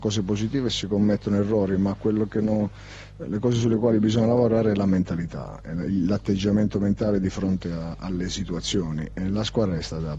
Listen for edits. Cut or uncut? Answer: uncut